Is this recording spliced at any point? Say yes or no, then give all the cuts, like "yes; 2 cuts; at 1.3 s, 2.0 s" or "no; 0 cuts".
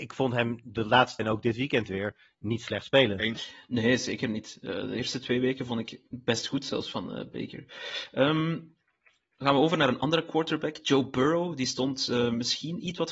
yes; 1 cut; at 1.2 s